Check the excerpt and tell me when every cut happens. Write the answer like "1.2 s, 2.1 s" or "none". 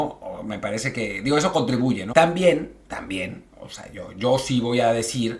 2.1 s